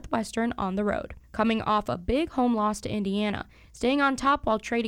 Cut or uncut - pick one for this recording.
cut